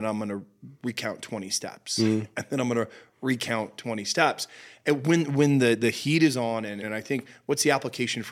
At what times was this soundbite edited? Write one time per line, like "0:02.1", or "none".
0:06.8